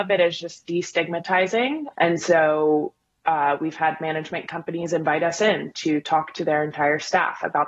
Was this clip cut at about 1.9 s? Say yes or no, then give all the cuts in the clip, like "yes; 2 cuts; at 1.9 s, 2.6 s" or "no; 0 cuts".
yes; 1 cut; at 1.9 s